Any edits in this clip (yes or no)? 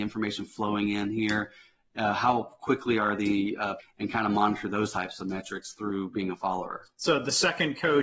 yes